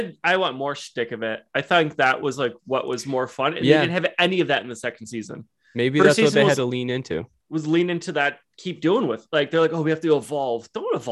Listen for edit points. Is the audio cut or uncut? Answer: uncut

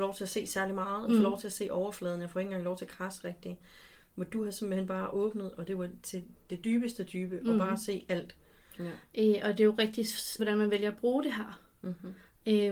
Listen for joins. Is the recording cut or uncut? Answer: cut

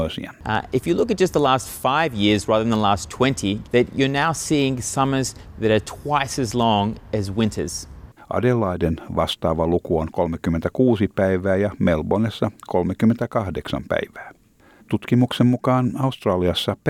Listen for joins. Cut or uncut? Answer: cut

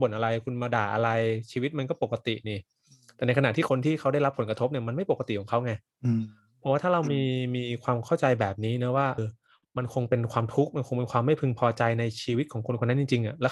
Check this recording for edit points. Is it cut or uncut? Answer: cut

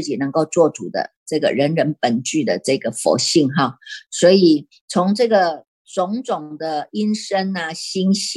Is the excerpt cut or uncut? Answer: uncut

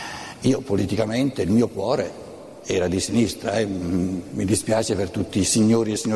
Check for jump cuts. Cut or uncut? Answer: uncut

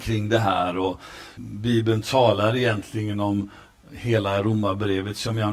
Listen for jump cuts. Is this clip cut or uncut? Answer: cut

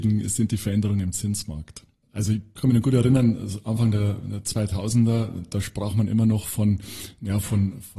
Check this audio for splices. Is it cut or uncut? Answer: cut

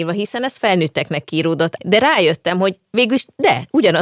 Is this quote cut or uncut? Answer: cut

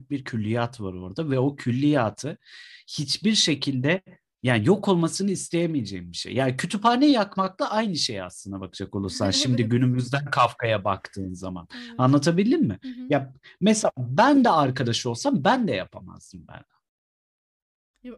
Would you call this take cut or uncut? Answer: uncut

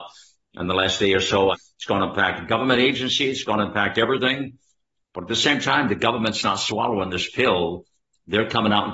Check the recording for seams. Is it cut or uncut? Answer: cut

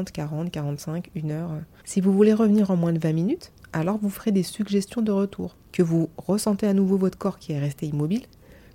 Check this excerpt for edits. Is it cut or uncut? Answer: cut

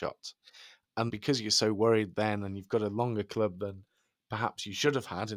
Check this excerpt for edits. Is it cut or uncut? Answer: cut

